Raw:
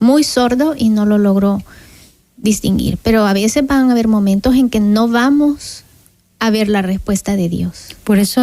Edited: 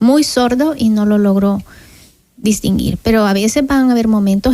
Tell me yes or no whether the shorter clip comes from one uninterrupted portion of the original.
yes